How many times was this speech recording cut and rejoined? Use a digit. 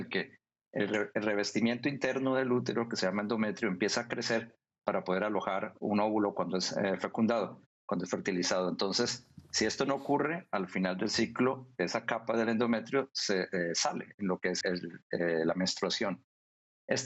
1